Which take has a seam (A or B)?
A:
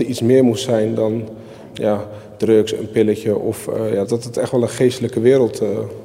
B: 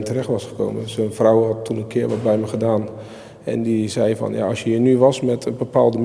A